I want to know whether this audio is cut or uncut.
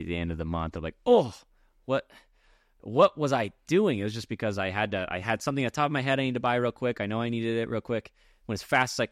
uncut